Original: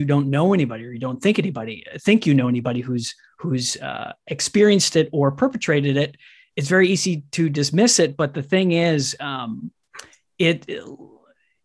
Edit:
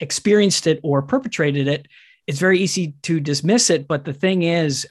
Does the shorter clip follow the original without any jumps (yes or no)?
yes